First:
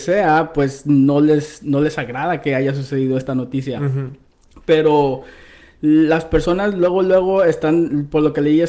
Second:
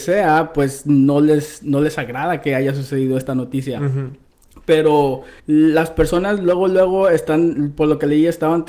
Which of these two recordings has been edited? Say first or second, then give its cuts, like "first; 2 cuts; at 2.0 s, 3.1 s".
second; 1 cut; at 5.4 s